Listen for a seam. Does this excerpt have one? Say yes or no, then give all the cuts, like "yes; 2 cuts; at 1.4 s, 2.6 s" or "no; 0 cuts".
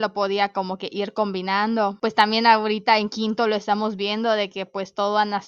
no; 0 cuts